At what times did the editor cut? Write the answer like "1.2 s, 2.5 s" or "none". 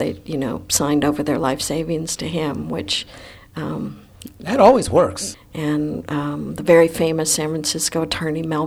5.3 s